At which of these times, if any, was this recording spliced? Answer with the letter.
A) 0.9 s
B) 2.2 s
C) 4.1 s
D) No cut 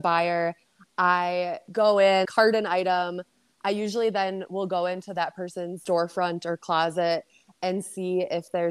B